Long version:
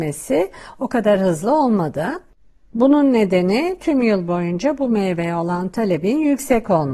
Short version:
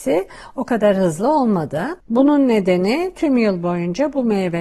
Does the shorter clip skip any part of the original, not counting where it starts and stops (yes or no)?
yes